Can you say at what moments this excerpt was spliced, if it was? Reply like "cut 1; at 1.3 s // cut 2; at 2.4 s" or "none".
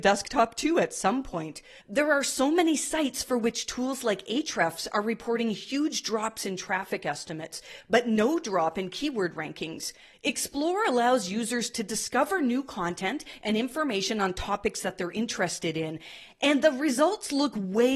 cut 1; at 1.8 s // cut 2; at 10.1 s